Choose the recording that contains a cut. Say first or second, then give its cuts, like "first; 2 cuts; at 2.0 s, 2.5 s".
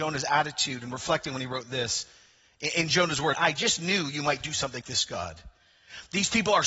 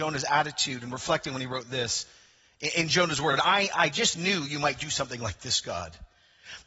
first; 2 cuts; at 3.3 s, 4.8 s